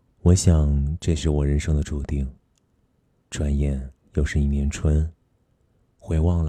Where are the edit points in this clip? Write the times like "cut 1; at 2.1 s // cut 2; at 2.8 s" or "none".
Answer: cut 1; at 3.2 s

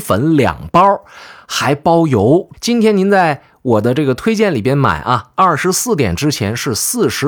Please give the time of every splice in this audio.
cut 1; at 2.5 s

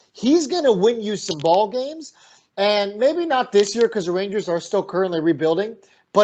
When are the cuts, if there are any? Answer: none

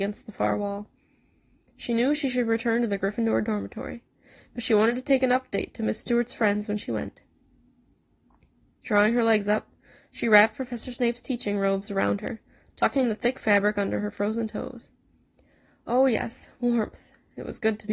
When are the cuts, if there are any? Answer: none

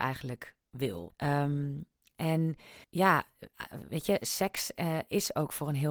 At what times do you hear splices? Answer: cut 1; at 1.1 s // cut 2; at 2.8 s

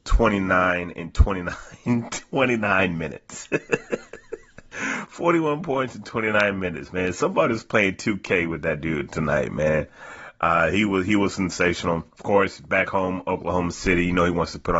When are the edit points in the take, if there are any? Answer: cut 1; at 12.1 s

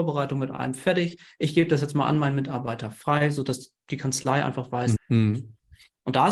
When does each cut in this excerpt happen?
cut 1; at 5.0 s

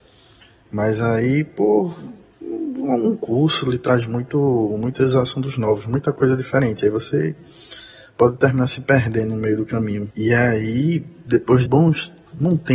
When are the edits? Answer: cut 1; at 10.1 s // cut 2; at 11.7 s

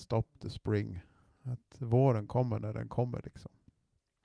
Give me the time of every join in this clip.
none

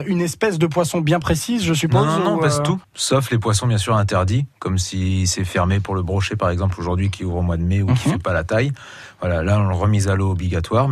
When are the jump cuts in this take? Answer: cut 1; at 2.8 s

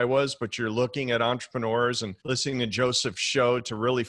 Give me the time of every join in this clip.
cut 1; at 2.2 s

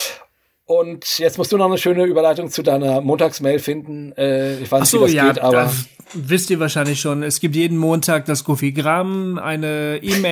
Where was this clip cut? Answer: none

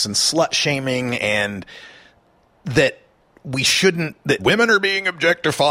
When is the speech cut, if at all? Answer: cut 1; at 4.4 s

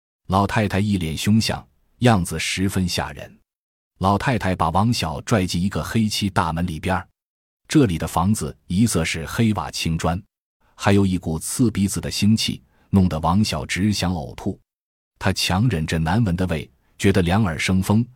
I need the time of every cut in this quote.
cut 1; at 10.6 s

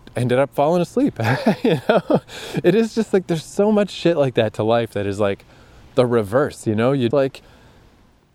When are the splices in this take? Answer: cut 1; at 7.1 s

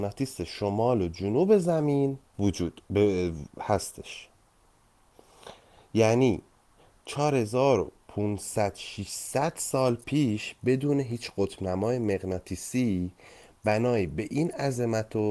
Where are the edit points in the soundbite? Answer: cut 1; at 2.3 s

